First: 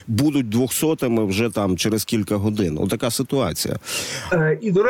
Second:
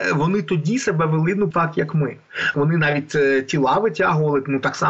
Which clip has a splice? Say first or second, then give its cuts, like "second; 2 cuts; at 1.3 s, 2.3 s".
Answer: second; 2 cuts; at 1.5 s, 2.5 s